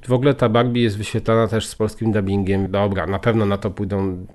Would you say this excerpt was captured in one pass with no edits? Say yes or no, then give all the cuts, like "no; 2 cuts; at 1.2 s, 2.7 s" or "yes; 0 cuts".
no; 1 cut; at 2.7 s